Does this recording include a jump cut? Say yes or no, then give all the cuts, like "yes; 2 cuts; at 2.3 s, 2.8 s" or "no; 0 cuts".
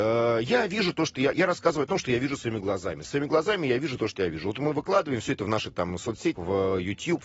yes; 1 cut; at 6.4 s